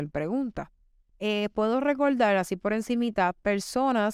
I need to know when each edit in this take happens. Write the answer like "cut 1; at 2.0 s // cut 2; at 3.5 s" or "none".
cut 1; at 1.1 s